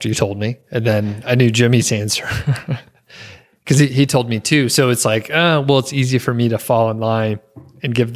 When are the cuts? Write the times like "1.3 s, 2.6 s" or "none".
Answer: none